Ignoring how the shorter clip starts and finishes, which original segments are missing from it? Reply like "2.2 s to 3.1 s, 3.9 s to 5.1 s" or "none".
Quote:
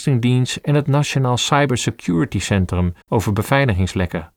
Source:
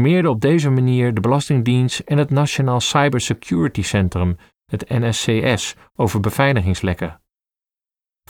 4.4 s to 5.9 s